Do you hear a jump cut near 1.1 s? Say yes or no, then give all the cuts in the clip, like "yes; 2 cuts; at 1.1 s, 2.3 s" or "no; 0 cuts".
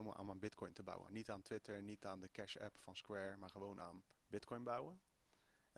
yes; 2 cuts; at 1.1 s, 4.1 s